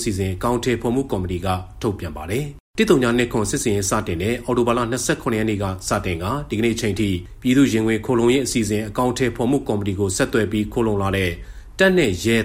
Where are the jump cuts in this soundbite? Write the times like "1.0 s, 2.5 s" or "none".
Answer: 2.7 s